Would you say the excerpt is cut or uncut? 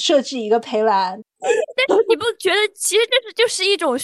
cut